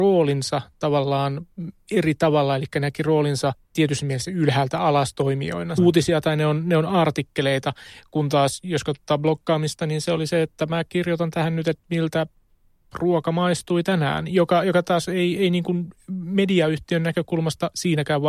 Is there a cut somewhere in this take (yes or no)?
yes